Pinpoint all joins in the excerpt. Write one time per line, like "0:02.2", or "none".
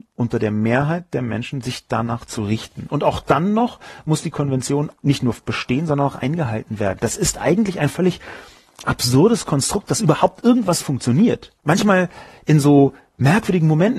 0:11.6